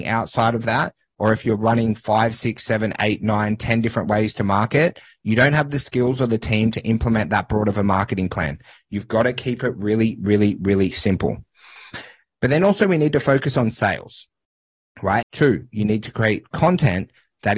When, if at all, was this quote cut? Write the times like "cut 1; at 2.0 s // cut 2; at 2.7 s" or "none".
cut 1; at 15.2 s

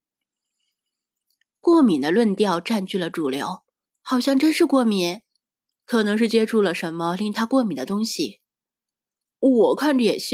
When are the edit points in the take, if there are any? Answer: cut 1; at 3.9 s // cut 2; at 5.7 s

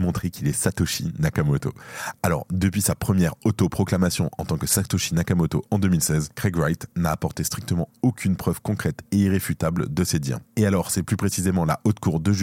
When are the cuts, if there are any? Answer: cut 1; at 10.4 s

